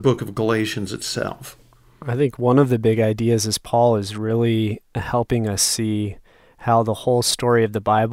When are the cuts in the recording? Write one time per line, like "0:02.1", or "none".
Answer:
none